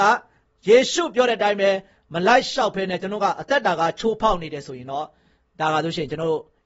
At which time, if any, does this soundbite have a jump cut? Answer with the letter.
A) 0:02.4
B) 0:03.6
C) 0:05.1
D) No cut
D